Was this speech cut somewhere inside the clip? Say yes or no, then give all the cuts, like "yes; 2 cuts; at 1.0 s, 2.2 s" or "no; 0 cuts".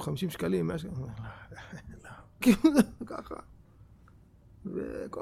yes; 1 cut; at 2.4 s